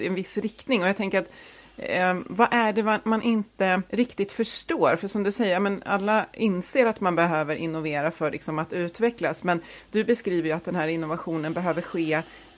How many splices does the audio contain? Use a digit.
1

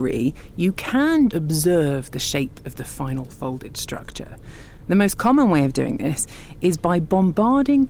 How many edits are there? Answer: 1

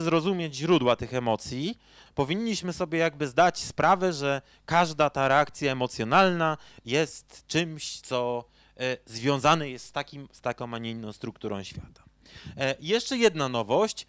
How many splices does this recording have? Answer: 1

